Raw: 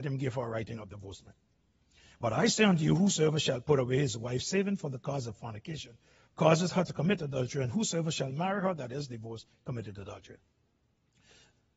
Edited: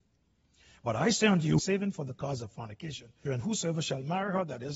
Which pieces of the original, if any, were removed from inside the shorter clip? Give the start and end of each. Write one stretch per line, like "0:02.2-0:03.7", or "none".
0:03.0-0:04.4
0:06.1-0:07.5